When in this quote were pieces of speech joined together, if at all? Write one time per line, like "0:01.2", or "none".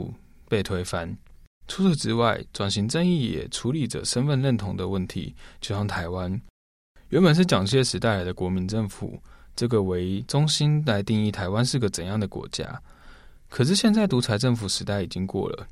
0:01.6